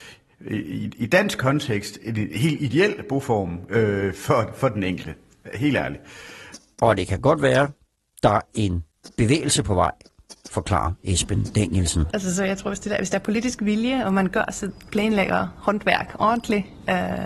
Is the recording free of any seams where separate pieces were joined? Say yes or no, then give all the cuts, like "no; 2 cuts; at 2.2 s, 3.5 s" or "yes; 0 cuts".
no; 3 cuts; at 8.5 s, 10.4 s, 12.1 s